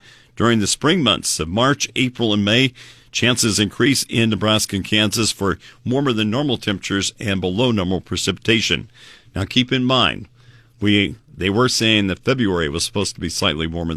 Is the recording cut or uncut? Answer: uncut